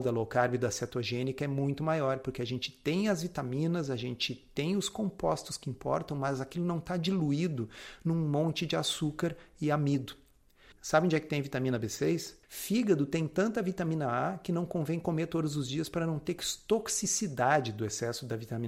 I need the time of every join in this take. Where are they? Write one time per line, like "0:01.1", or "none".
0:10.7
0:12.4